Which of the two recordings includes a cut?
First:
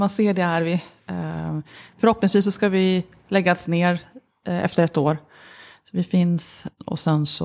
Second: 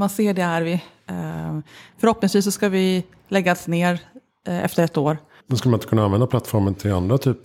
second; 1 cut; at 5.4 s

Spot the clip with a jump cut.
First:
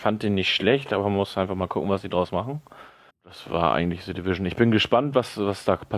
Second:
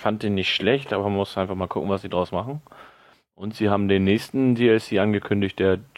first; 1 cut; at 3.1 s

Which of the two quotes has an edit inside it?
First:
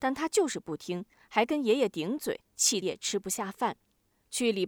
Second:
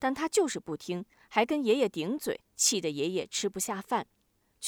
first; 1 cut; at 2.8 s

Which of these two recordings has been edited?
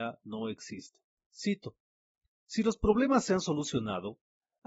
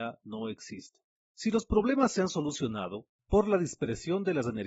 second; 2 cuts; at 1.2 s, 3.2 s

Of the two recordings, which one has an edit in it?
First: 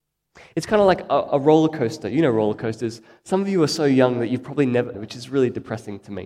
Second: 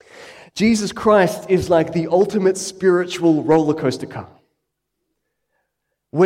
first; 1 cut; at 4.9 s

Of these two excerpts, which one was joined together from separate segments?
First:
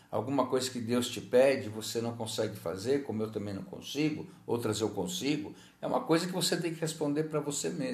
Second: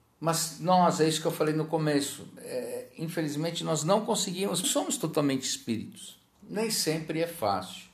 second; 2 cuts; at 4.6 s, 6.4 s

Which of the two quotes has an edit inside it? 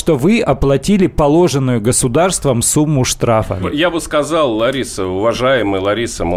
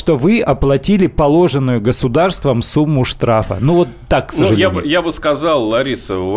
first; 1 cut; at 3.6 s

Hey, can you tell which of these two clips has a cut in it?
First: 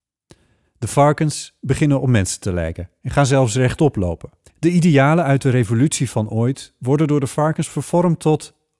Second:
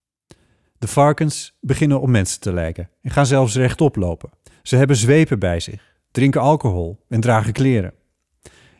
first; 1 cut; at 4.5 s

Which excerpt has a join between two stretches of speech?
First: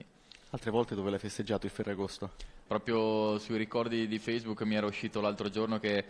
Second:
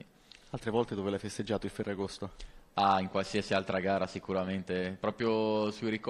first; 1 cut; at 2.7 s

